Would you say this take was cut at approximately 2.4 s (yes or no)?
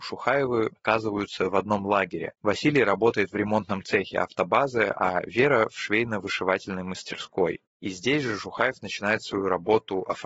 yes